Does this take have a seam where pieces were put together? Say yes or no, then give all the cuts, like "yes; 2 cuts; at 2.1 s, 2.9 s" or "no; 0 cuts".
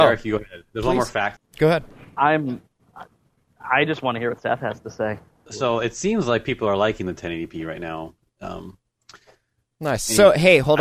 yes; 2 cuts; at 1.4 s, 5.5 s